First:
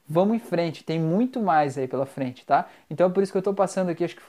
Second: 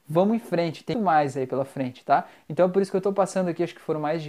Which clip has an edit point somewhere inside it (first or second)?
second